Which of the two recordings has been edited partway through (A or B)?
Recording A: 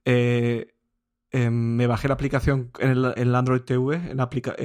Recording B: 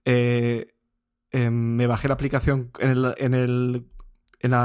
A